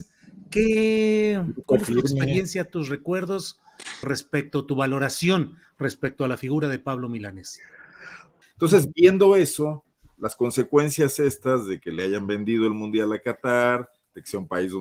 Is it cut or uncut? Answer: cut